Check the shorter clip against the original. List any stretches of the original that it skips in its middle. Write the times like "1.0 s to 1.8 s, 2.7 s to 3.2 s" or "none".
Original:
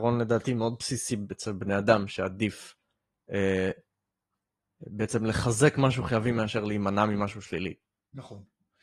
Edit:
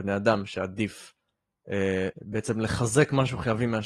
3.7 s to 4.8 s